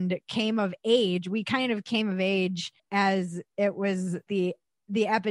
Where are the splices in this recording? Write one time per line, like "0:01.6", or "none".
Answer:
0:02.8
0:04.3